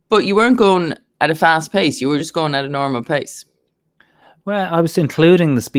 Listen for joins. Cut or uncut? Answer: uncut